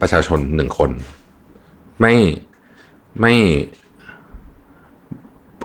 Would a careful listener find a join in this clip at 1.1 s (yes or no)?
no